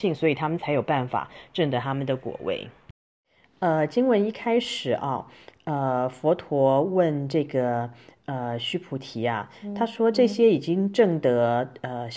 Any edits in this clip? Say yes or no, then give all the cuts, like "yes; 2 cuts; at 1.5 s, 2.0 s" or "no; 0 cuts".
no; 0 cuts